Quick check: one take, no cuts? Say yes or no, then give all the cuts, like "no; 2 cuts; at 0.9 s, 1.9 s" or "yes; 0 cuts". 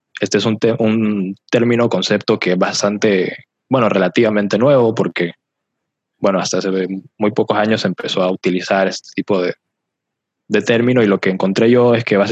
yes; 0 cuts